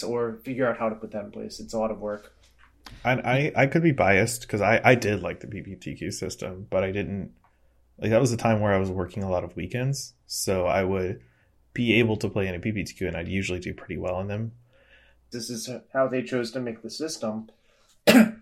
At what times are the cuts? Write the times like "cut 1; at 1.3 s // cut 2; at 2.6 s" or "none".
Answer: cut 1; at 15.3 s

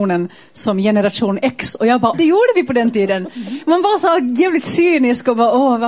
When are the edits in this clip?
cut 1; at 2.1 s

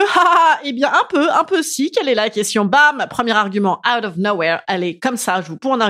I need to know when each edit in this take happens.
none

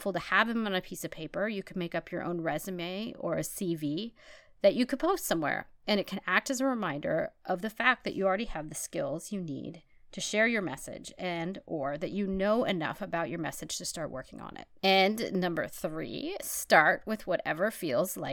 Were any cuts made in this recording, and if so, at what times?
none

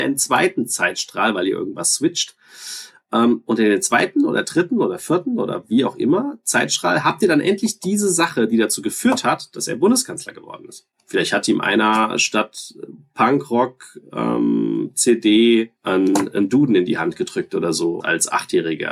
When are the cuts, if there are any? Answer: cut 1; at 15.8 s // cut 2; at 18.0 s

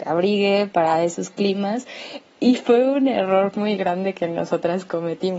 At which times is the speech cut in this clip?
none

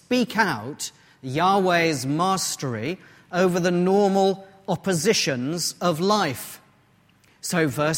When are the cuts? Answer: none

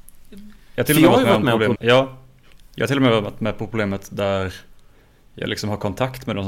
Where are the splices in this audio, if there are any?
cut 1; at 1.8 s

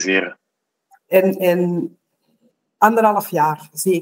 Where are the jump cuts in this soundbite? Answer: cut 1; at 1.0 s

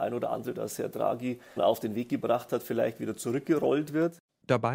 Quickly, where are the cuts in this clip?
cut 1; at 1.6 s

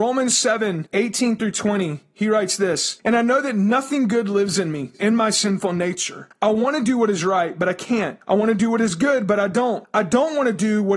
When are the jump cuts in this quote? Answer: cut 1; at 4.9 s

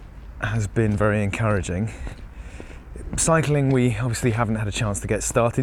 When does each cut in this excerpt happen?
none

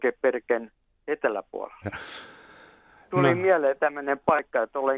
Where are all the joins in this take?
cut 1; at 1.8 s

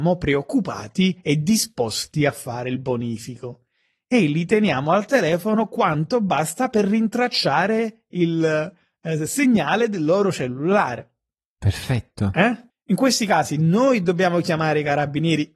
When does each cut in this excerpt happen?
cut 1; at 12.7 s

